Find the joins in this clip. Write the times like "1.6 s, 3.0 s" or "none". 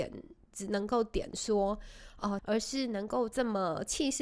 2.4 s